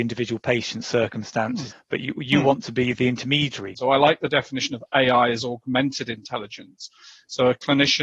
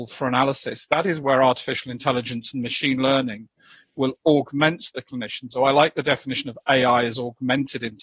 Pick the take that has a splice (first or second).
first